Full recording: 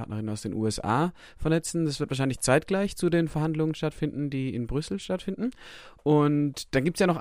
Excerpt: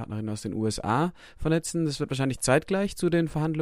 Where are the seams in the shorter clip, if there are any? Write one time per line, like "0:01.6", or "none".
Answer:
none